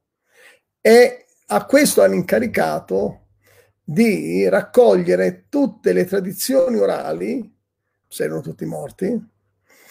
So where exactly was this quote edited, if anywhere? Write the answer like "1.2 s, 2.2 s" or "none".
8.0 s